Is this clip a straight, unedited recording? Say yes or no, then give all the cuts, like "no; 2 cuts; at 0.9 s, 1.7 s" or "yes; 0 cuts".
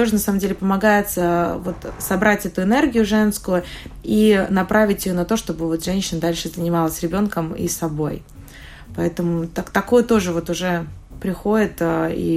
yes; 0 cuts